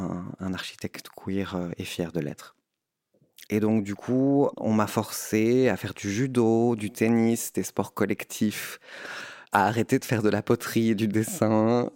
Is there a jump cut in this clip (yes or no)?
yes